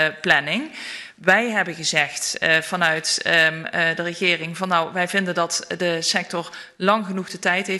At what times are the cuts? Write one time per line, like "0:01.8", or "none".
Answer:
none